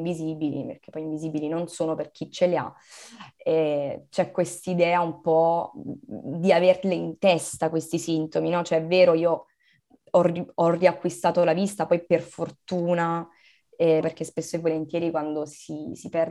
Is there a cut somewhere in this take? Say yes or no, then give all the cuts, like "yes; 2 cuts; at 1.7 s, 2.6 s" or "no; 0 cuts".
yes; 1 cut; at 14.0 s